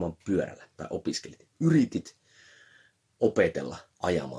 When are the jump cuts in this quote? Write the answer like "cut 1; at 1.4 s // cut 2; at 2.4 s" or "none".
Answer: none